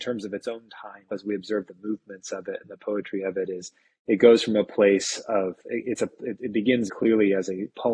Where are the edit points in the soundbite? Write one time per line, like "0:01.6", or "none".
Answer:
0:01.1
0:06.9